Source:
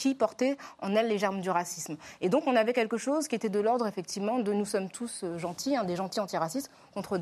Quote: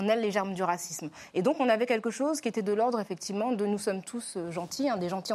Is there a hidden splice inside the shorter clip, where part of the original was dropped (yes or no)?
no